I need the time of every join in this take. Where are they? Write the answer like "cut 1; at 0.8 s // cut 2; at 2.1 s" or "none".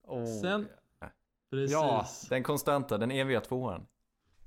cut 1; at 1.0 s